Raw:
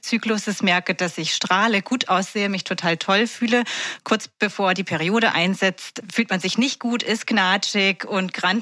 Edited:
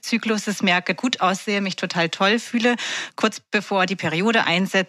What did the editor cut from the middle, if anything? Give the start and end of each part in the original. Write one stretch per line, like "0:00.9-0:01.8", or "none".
0:01.0-0:01.8